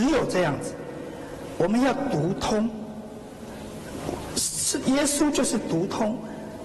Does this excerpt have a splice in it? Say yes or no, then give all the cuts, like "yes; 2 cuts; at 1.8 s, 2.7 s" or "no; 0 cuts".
no; 0 cuts